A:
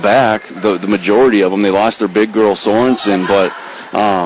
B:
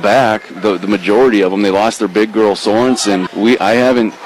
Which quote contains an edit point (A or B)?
B